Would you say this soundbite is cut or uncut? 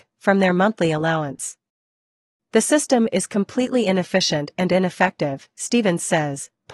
cut